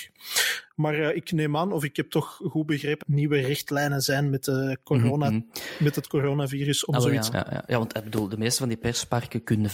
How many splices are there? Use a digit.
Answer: 2